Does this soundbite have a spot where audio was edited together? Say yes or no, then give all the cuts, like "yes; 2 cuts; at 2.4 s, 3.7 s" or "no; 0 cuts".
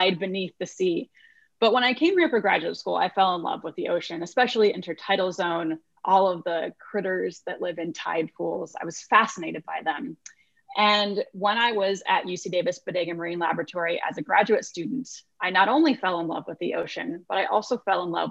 no; 0 cuts